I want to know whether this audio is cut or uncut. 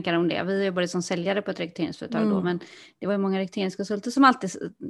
uncut